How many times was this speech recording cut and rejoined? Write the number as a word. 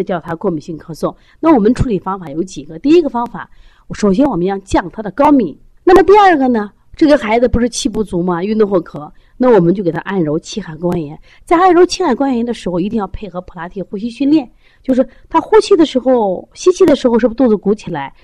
one